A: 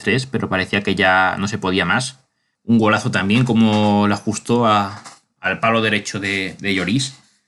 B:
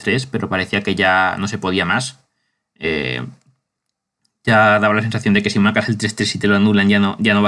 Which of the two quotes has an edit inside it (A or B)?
A